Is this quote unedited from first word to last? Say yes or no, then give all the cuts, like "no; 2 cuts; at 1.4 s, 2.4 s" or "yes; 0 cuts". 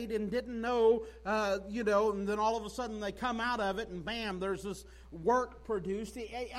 yes; 0 cuts